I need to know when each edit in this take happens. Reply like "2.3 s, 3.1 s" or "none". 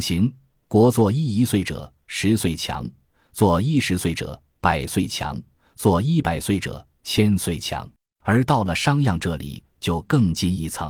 8.1 s